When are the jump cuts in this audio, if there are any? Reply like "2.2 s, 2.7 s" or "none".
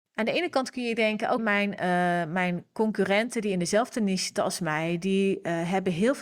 1.4 s